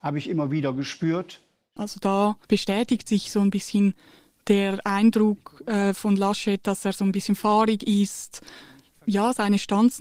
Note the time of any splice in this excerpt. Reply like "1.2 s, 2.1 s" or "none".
2.4 s